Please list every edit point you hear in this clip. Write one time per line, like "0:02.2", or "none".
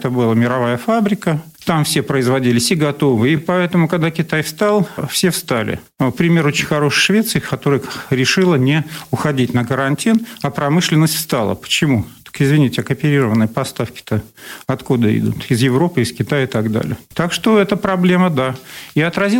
0:03.4